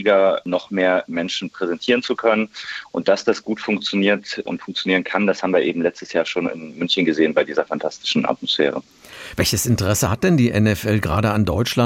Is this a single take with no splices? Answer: yes; 0 cuts

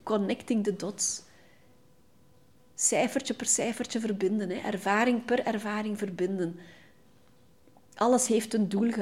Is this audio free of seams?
yes; 0 cuts

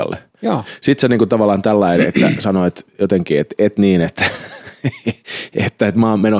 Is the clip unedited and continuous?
yes; 0 cuts

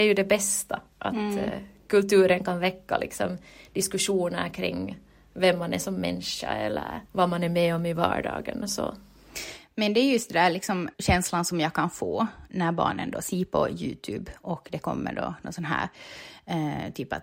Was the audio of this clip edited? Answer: yes; 2 cuts; at 7.1 s, 10.9 s

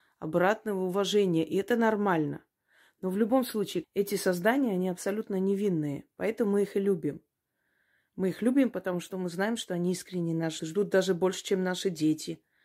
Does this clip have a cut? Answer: yes; 2 cuts; at 3.8 s, 10.6 s

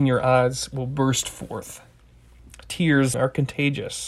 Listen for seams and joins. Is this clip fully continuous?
no; 1 cut; at 3.1 s

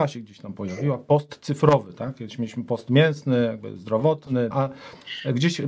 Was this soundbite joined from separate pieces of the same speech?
yes; 1 cut; at 4.5 s

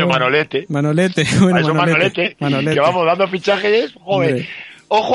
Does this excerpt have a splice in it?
no; 0 cuts

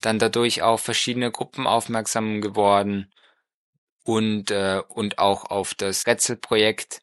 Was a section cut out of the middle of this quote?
no; 0 cuts

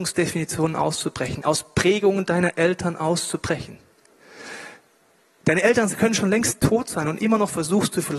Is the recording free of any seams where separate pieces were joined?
yes; 0 cuts

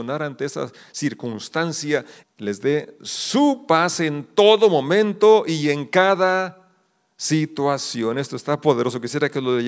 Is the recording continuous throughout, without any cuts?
no; 1 cut; at 2.2 s

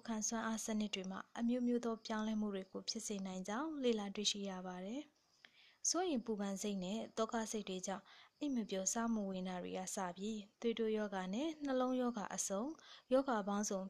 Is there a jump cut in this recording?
yes; 1 cut; at 5.1 s

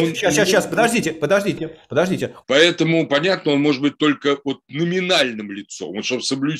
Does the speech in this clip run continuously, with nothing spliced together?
no; 1 cut; at 2.4 s

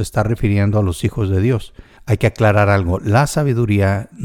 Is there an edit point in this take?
yes; 1 cut; at 2.0 s

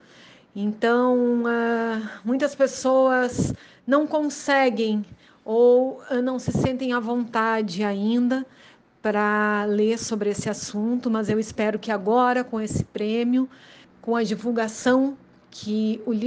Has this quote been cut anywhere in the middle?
yes; 1 cut; at 13.8 s

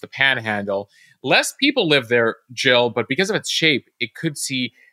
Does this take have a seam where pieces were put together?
no; 0 cuts

